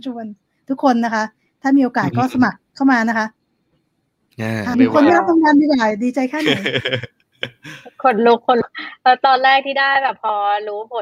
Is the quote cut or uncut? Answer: cut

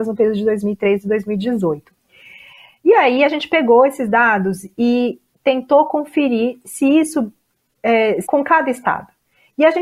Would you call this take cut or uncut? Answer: cut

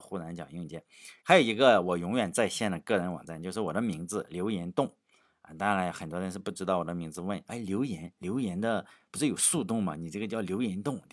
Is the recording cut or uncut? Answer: cut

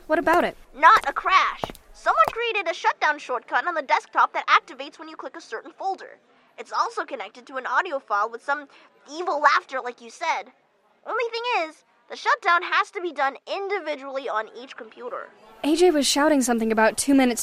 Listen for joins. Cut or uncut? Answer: cut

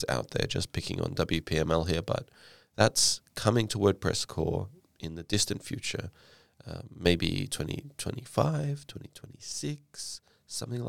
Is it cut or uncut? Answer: uncut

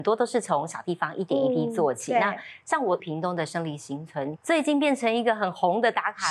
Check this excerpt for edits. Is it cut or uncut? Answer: cut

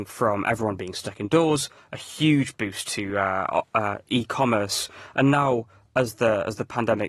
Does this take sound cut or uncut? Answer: uncut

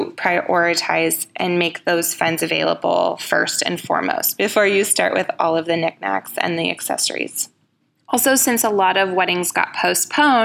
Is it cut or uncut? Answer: uncut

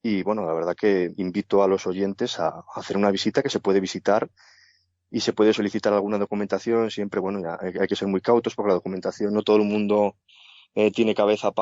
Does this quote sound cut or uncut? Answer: uncut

